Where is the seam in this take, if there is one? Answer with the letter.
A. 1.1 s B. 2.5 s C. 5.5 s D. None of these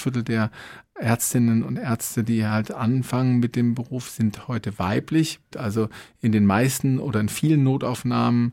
C